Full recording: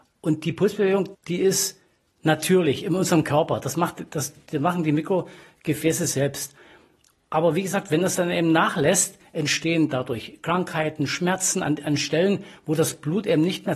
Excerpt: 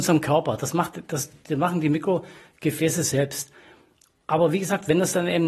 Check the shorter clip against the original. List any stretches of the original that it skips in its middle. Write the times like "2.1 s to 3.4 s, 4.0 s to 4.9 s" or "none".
none